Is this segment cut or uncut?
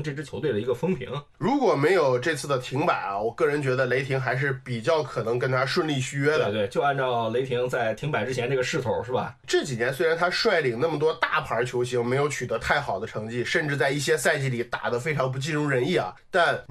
uncut